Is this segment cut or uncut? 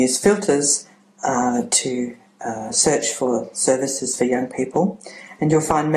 uncut